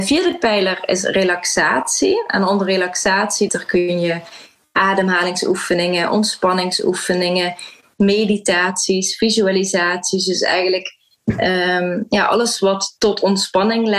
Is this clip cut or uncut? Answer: cut